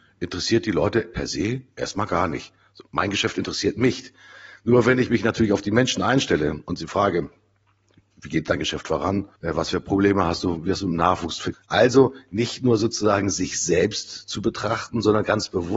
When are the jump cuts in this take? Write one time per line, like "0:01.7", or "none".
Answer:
0:09.4
0:11.5